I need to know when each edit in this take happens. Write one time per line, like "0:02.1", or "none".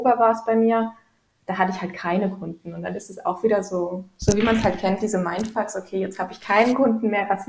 none